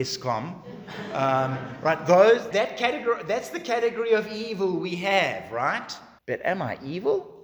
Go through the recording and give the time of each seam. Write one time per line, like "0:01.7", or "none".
0:02.5
0:06.2